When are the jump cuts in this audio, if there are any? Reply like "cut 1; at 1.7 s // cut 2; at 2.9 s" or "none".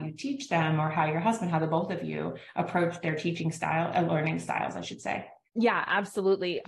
none